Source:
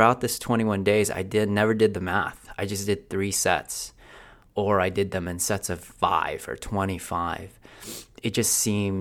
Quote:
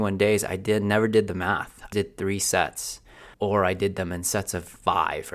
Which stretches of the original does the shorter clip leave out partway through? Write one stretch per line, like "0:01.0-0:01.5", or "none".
0:02.6-0:02.8
0:04.3-0:04.5